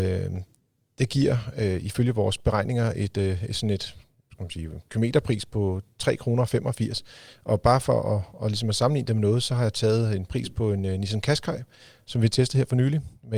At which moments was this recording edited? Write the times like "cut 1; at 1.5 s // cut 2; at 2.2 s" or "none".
none